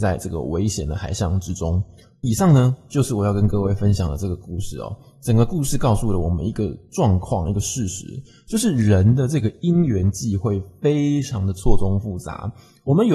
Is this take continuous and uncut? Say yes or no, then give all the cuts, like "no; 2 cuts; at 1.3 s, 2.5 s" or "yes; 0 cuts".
yes; 0 cuts